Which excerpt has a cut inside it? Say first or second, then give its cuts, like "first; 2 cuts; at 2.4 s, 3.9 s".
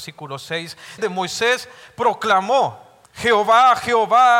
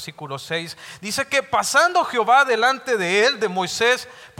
first; 2 cuts; at 1.0 s, 3.0 s